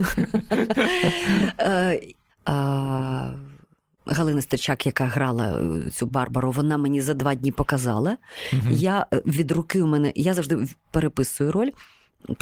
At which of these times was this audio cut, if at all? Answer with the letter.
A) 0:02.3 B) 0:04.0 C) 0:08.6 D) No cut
A